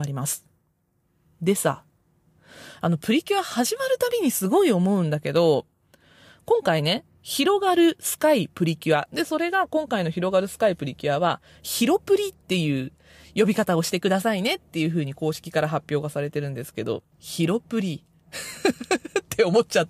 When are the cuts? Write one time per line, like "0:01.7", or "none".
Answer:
0:09.1
0:12.4
0:17.1